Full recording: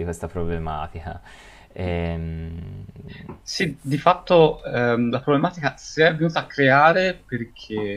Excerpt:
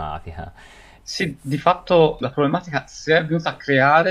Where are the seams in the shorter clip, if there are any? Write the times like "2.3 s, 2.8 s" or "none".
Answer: 1.0 s, 2.2 s